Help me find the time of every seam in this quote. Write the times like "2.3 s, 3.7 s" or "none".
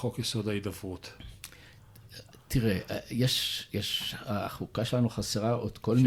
none

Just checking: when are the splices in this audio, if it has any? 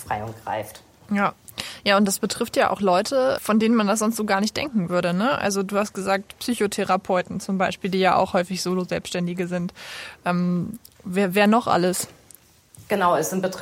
3.4 s

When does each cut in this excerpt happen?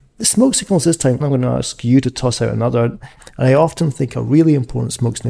1.2 s, 3.2 s

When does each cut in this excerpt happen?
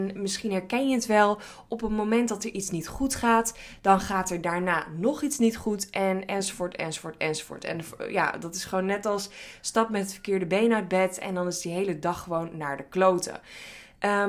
none

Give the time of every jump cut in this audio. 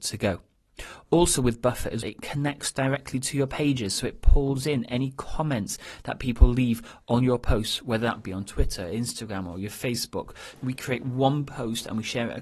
2.0 s, 10.5 s

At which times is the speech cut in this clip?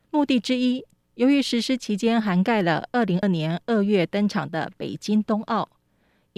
1.0 s, 3.2 s

